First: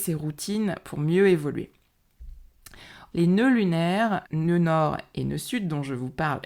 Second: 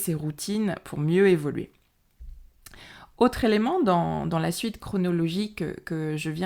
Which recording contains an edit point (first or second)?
first